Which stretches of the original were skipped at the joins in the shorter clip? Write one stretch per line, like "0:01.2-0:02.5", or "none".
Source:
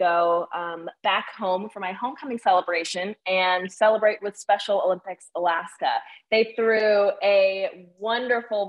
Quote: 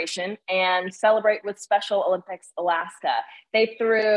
none